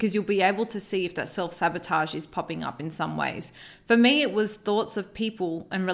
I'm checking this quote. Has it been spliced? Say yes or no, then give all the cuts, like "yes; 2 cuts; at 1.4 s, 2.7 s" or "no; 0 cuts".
no; 0 cuts